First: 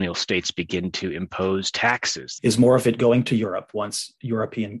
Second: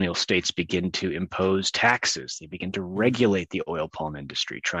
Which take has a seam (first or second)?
first